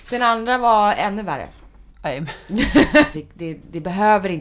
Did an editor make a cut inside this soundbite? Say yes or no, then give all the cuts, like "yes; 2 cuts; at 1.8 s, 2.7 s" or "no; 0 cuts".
yes; 1 cut; at 3.1 s